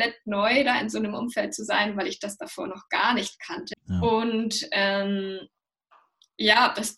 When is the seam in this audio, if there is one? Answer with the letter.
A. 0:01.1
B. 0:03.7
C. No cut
B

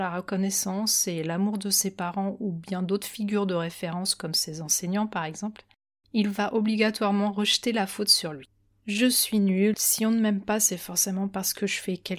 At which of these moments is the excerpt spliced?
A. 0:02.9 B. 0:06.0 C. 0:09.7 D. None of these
C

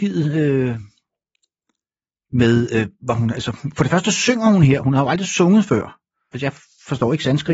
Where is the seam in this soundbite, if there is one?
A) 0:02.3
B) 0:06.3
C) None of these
B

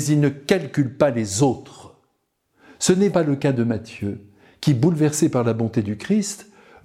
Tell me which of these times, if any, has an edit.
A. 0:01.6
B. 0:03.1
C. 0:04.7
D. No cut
B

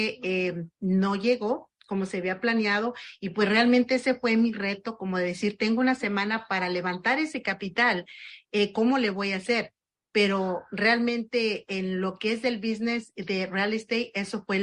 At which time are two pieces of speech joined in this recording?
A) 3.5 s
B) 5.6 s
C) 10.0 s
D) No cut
D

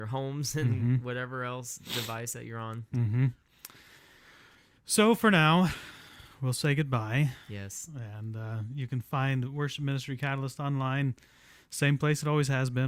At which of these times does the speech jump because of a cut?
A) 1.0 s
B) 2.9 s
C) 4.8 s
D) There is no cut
B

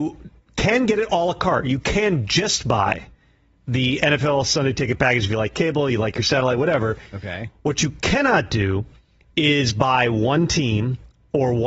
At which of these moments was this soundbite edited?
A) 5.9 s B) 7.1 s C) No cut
B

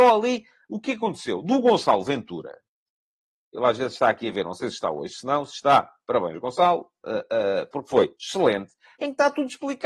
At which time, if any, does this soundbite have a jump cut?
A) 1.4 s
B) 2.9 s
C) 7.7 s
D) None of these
D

